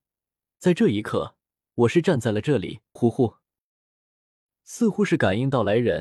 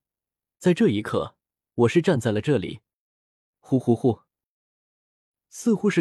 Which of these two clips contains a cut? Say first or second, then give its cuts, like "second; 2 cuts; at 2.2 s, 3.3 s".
first; 1 cut; at 3.0 s